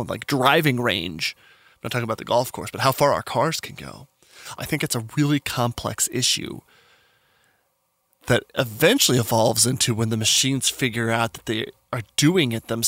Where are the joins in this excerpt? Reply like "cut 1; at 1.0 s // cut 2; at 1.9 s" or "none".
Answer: cut 1; at 4.6 s